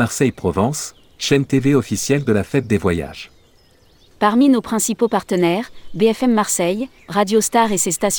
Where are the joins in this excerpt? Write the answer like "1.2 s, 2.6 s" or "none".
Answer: 4.1 s, 7.0 s